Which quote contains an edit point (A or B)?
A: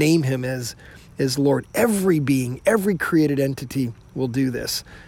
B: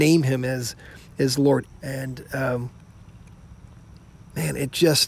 B